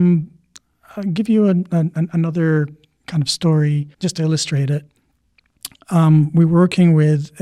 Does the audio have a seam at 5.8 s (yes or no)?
no